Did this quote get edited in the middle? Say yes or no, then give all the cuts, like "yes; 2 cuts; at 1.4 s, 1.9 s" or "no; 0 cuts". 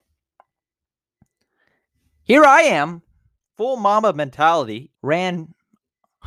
yes; 1 cut; at 4.9 s